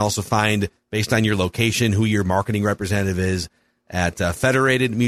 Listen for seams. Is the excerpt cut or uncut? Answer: uncut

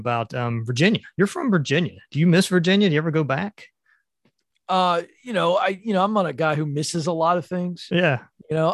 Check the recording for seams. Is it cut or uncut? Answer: uncut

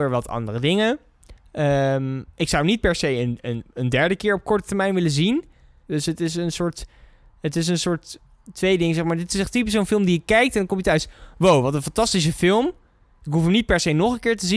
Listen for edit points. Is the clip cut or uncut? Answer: cut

